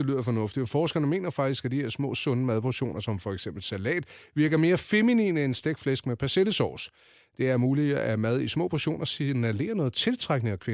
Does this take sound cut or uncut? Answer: uncut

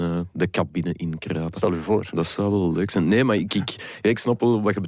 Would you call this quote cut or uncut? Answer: uncut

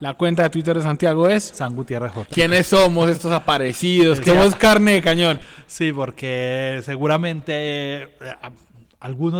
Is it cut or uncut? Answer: cut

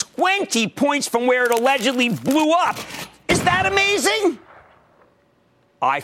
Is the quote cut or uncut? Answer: uncut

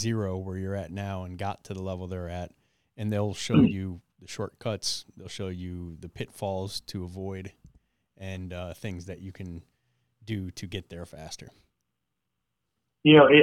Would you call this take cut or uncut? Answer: uncut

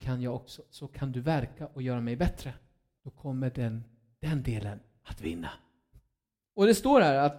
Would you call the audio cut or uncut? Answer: cut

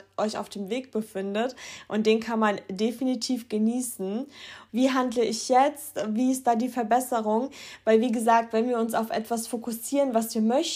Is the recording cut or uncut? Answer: cut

